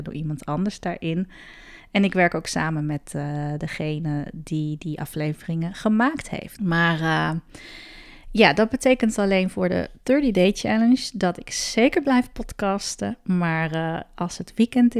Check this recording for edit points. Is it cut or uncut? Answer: cut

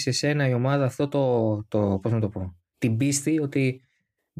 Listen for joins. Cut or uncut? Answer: uncut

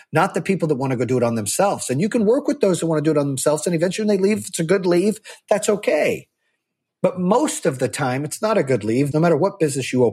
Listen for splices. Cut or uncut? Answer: cut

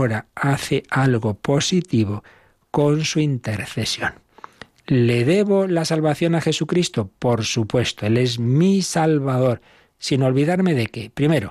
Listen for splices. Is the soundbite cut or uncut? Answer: uncut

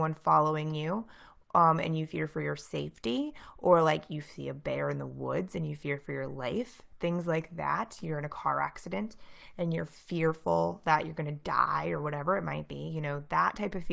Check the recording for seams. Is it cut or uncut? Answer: uncut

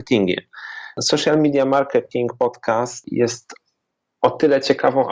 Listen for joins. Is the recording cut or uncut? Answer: uncut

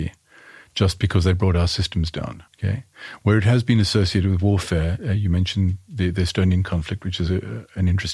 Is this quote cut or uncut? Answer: cut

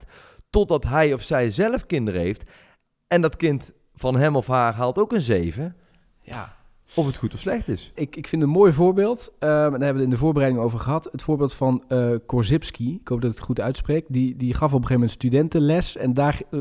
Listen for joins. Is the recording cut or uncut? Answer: cut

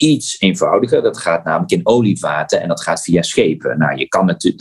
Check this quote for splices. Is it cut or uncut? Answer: uncut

